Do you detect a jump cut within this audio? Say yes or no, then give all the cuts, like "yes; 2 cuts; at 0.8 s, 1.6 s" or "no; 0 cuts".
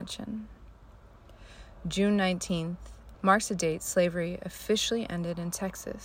yes; 1 cut; at 3.1 s